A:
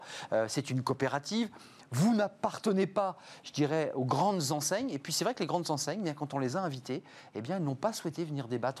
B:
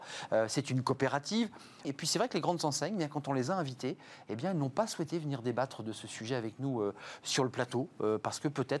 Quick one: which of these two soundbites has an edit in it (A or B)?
B